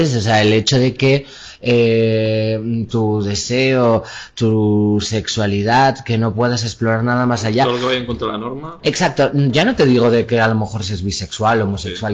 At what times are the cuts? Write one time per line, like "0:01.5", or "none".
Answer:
0:02.9